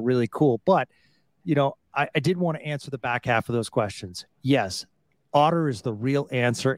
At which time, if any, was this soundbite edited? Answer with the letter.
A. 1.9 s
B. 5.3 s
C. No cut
C